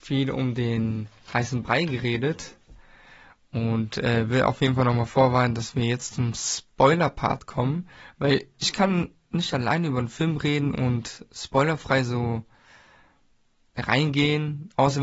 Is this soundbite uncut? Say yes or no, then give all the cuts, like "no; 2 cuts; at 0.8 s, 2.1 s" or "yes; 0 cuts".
yes; 0 cuts